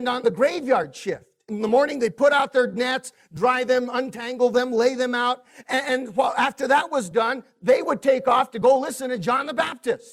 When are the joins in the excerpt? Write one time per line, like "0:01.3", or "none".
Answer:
0:01.5